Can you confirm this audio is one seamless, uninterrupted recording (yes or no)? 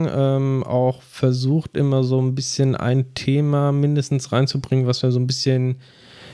yes